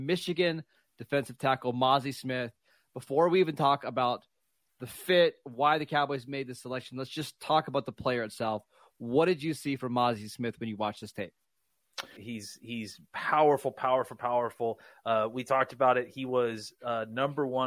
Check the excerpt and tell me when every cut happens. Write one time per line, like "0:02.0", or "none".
0:12.2